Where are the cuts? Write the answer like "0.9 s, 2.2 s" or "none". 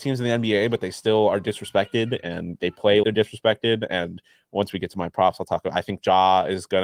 3.0 s